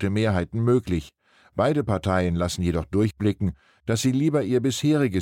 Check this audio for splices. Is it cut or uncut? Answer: uncut